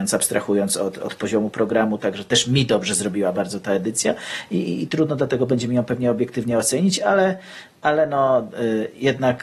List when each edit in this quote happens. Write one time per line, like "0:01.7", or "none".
none